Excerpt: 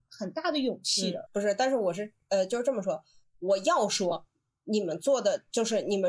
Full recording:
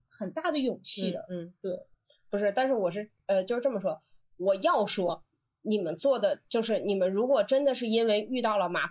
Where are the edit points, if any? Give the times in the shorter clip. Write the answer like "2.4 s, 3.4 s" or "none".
1.3 s